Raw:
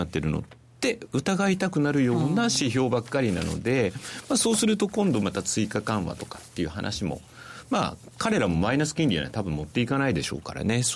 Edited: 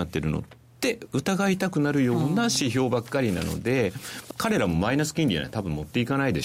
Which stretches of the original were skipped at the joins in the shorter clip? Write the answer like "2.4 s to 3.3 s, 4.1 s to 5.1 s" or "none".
4.3 s to 8.1 s